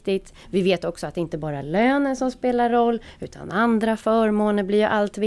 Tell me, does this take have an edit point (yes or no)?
no